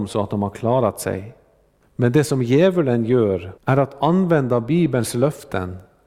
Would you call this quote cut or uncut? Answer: cut